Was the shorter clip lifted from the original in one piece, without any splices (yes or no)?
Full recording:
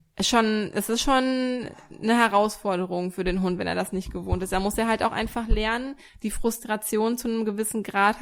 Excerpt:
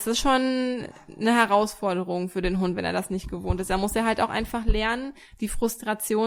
yes